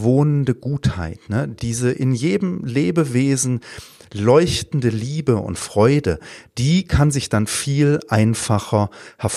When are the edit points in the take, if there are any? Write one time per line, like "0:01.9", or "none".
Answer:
none